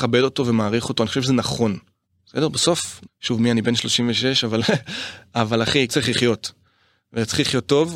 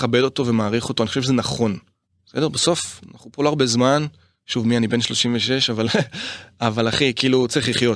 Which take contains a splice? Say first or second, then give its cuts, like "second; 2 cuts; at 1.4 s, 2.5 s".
first; 2 cuts; at 3.1 s, 5.9 s